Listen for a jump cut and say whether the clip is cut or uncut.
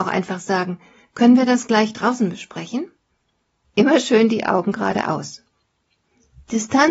cut